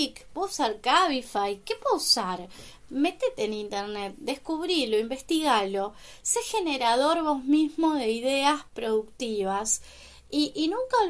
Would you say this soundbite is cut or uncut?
uncut